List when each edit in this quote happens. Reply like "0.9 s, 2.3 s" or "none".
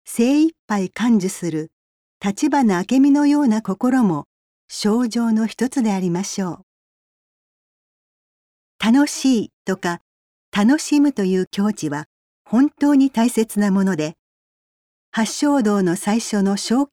none